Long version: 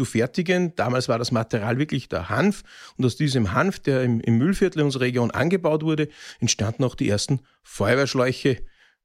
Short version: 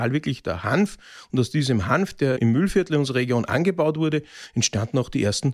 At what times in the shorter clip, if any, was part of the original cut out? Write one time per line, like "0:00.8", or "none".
0:02.4